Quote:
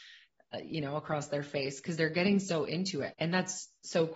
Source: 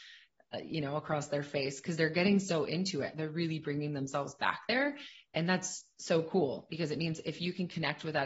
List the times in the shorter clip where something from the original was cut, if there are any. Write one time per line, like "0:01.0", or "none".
0:03.1